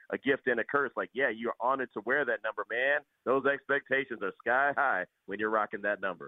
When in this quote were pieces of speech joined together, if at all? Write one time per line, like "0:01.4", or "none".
0:02.7